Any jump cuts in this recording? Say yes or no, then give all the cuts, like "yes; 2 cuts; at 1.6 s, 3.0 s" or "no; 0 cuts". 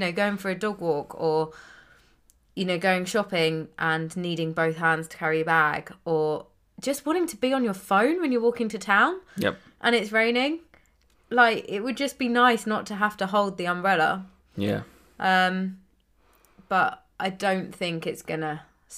no; 0 cuts